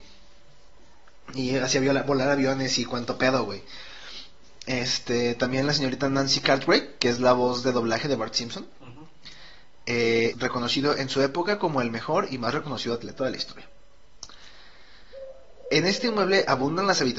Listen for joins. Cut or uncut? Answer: cut